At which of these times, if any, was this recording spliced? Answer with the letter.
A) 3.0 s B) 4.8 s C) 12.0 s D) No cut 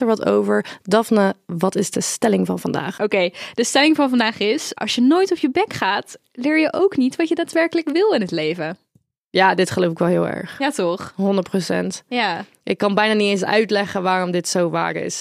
B